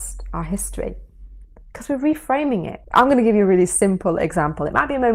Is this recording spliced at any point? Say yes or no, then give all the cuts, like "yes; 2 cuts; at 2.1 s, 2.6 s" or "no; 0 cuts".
yes; 1 cut; at 2.8 s